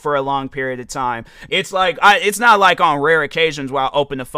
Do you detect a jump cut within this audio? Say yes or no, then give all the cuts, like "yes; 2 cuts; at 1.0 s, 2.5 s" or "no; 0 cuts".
yes; 1 cut; at 1.5 s